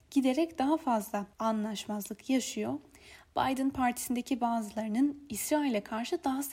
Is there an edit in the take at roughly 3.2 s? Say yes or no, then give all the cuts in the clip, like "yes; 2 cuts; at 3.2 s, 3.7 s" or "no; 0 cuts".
no; 1 cut; at 1.3 s